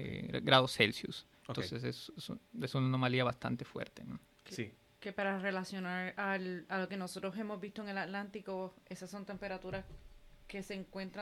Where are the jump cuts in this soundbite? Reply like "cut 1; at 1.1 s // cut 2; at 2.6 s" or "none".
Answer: cut 1; at 1.4 s